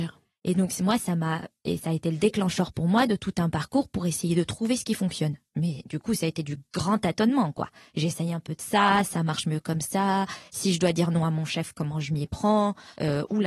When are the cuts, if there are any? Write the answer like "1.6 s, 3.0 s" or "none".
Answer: none